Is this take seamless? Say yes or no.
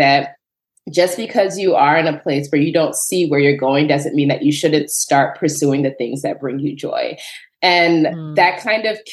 yes